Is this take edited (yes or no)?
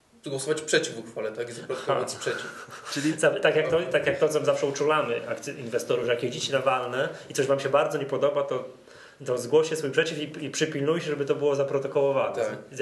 no